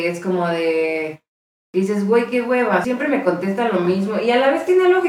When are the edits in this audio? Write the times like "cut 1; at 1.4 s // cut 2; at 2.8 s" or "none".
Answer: cut 1; at 2.8 s